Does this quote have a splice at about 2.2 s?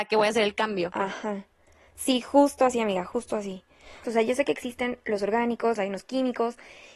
no; 2 cuts; at 4.0 s, 5.8 s

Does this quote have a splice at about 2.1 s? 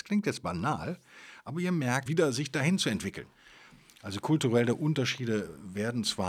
yes; 1 cut; at 2.1 s

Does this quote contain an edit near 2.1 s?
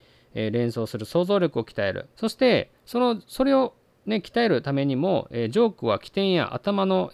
yes; 1 cut; at 2.1 s

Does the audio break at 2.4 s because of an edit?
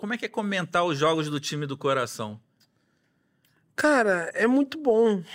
no; 0 cuts

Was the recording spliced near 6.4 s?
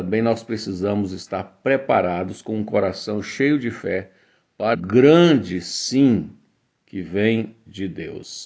no; 1 cut; at 4.7 s

